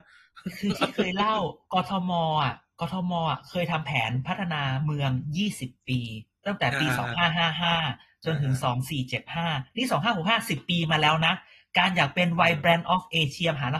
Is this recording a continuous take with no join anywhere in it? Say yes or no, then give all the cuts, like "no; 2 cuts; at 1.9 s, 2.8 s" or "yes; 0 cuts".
yes; 0 cuts